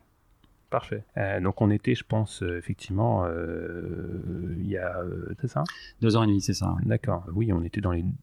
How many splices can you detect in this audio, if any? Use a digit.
3